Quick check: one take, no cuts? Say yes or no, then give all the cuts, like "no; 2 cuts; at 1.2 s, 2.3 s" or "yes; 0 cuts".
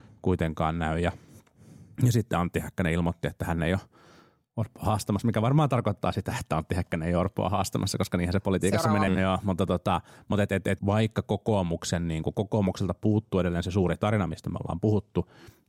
no; 2 cuts; at 9.1 s, 10.8 s